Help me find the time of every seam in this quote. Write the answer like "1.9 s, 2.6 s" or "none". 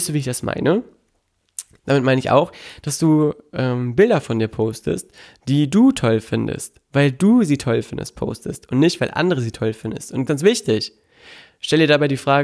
10.3 s